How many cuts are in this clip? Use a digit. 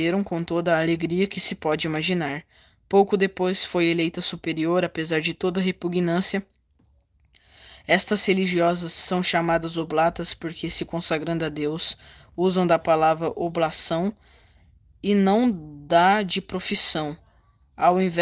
0